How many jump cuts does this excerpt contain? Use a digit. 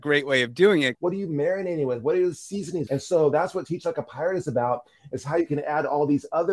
2